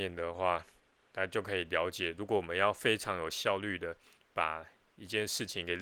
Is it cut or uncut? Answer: uncut